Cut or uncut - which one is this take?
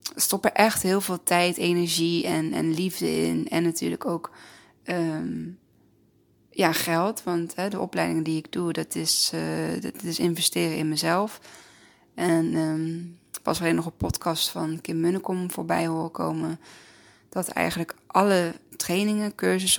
uncut